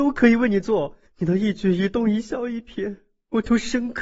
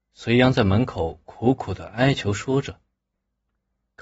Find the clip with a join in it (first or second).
first